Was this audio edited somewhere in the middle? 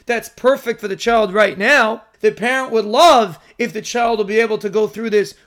yes; 1 cut; at 2.1 s

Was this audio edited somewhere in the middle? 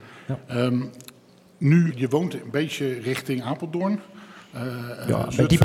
yes; 1 cut; at 1.9 s

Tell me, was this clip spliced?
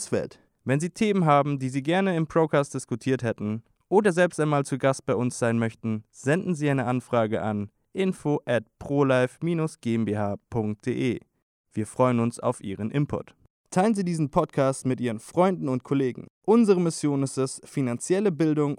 no; 0 cuts

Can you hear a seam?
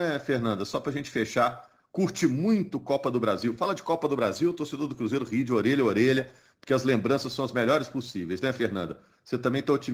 no; 0 cuts

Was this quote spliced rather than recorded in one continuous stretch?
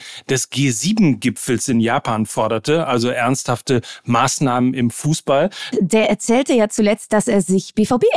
yes; 1 cut; at 5.7 s

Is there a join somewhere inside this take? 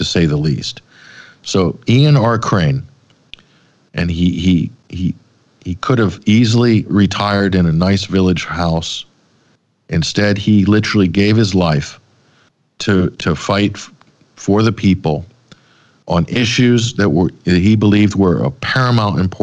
no; 0 cuts

